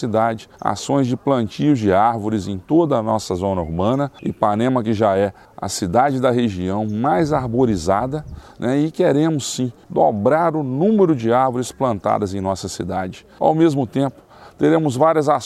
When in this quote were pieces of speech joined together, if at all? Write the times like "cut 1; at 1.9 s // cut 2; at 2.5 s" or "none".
none